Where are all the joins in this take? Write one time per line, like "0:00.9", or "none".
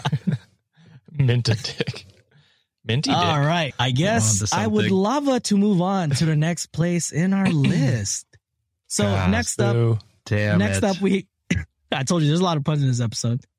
0:03.7